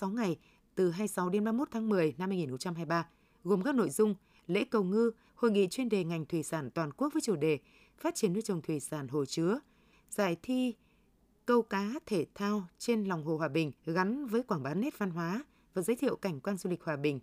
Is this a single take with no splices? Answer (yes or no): no